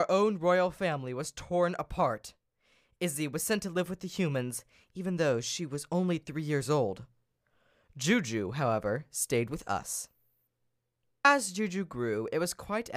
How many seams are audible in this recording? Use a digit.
0